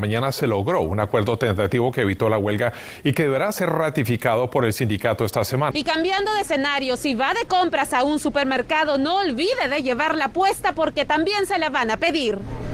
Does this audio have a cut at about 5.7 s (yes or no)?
yes